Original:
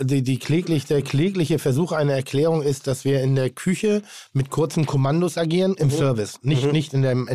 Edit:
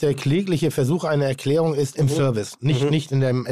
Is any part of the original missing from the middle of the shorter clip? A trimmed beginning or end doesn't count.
yes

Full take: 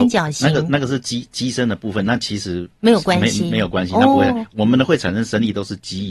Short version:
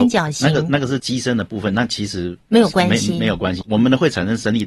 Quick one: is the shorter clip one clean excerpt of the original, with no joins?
no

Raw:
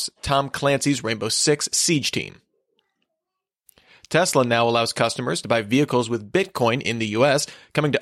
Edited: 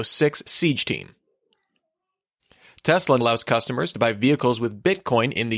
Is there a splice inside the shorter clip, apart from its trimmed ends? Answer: yes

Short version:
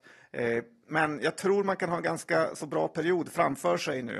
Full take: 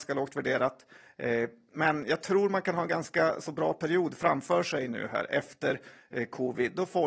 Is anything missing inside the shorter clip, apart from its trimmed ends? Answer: no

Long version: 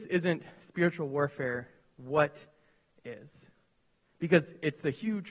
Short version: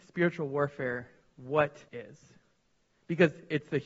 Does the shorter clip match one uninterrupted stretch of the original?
no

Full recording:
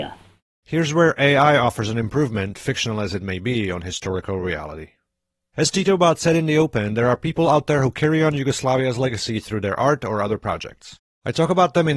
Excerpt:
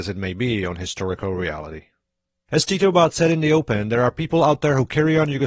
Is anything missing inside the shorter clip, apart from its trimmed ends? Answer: no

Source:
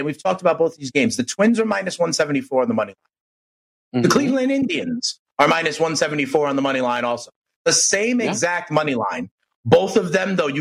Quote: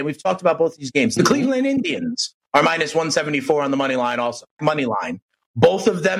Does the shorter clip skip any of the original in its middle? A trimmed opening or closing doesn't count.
yes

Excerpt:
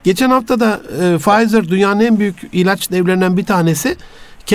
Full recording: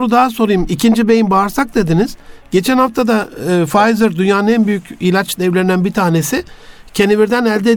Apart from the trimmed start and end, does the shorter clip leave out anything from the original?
no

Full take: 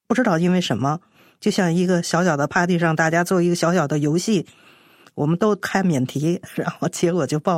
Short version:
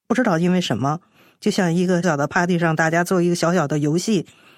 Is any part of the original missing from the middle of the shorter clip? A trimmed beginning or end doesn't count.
yes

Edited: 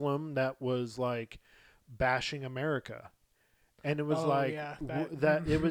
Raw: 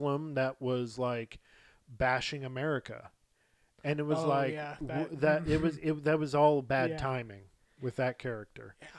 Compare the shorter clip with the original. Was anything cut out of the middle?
no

